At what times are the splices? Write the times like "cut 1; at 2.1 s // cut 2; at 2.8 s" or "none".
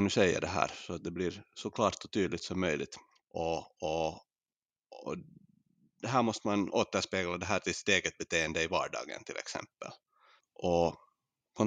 cut 1; at 3.2 s // cut 2; at 10.4 s